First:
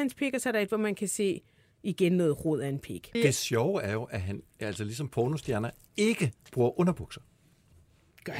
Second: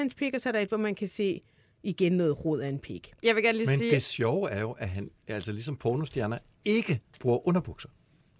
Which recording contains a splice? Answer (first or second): first